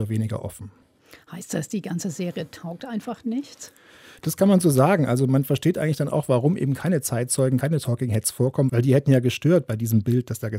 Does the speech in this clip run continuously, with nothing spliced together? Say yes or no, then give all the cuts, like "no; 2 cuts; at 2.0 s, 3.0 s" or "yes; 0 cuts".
yes; 0 cuts